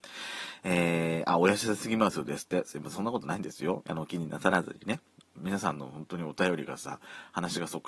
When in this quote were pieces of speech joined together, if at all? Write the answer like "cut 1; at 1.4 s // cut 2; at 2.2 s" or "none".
cut 1; at 3.8 s // cut 2; at 5.2 s